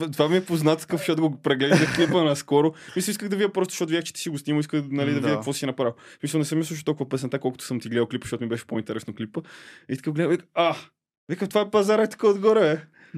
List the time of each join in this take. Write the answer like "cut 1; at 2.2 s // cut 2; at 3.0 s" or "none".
none